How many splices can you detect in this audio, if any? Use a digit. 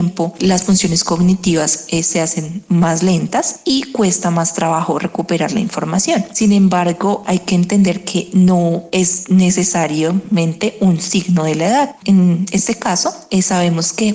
1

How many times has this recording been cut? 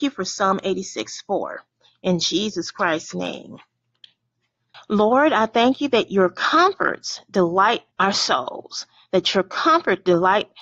2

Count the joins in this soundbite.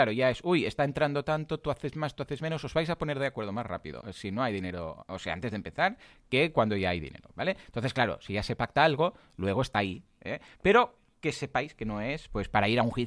0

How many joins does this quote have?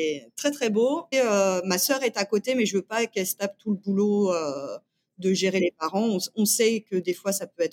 1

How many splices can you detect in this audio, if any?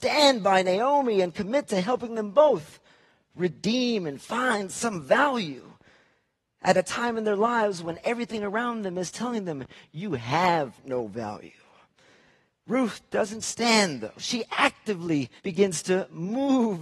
2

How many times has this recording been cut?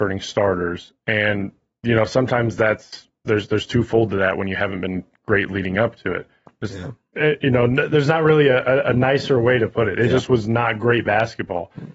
1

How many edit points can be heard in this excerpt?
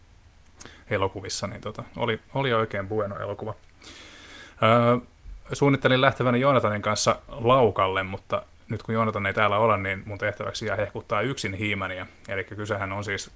0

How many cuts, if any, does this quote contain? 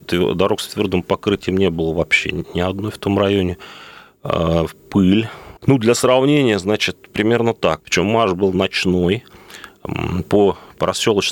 2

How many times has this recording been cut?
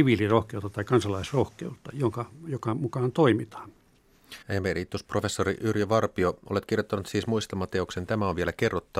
1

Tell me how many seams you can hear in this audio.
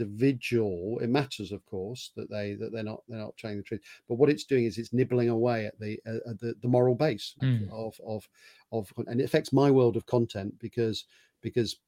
1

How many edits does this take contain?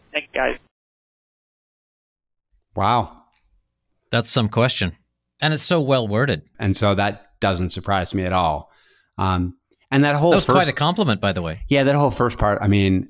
2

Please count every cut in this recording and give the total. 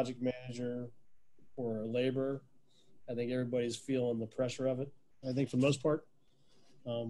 1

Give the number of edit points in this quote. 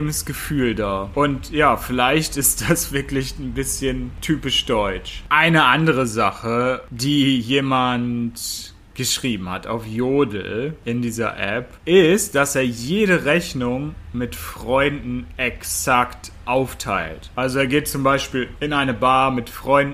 0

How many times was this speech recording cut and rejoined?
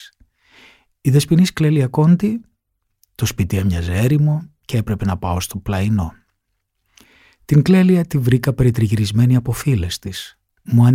0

